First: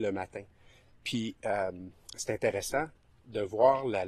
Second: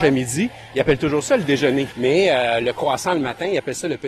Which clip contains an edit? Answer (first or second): second